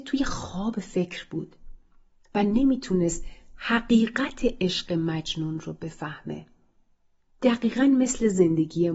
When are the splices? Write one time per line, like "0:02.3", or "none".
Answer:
none